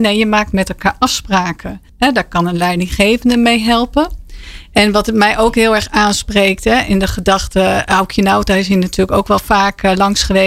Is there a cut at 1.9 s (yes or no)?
yes